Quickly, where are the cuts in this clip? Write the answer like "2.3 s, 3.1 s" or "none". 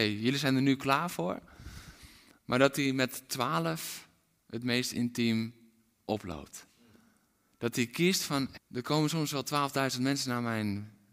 8.5 s